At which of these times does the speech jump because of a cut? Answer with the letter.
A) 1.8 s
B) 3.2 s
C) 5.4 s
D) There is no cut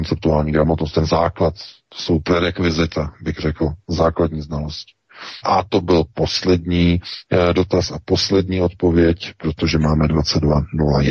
C